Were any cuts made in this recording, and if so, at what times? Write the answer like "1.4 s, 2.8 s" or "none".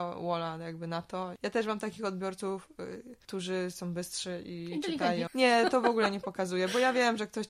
1.4 s, 5.3 s